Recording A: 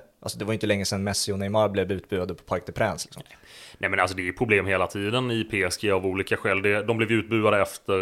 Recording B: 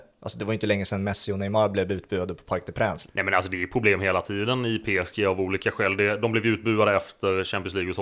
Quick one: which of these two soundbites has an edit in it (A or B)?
B